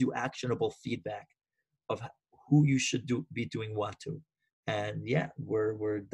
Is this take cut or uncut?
uncut